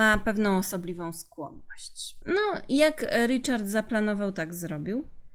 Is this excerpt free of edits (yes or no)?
no